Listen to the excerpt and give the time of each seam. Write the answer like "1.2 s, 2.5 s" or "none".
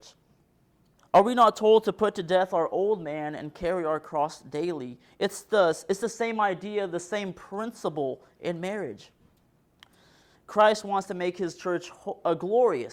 1.0 s, 10.3 s